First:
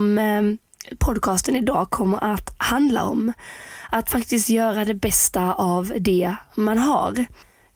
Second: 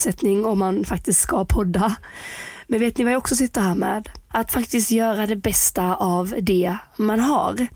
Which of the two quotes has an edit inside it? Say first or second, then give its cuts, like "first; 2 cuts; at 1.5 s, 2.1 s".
second; 1 cut; at 4.3 s